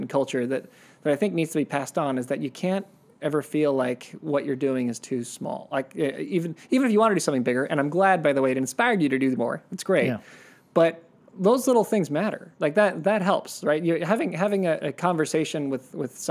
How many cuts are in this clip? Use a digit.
1